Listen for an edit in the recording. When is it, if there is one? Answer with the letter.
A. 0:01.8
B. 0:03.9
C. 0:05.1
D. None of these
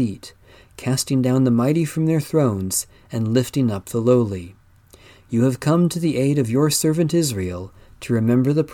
C